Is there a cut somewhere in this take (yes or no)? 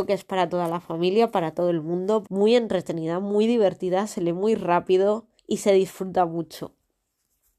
yes